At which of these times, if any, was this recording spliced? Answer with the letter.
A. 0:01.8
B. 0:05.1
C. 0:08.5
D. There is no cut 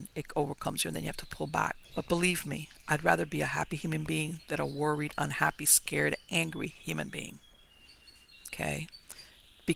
A